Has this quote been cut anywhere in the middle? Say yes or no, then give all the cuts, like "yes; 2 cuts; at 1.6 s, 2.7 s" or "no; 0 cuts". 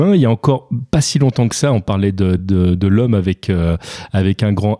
no; 0 cuts